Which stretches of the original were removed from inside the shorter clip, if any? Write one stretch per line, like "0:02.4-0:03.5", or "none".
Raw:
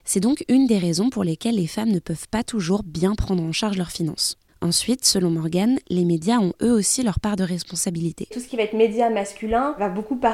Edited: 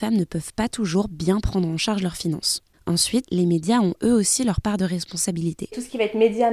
0:05.0-0:05.8